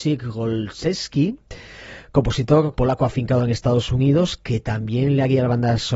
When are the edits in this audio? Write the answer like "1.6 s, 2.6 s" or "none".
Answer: 2.7 s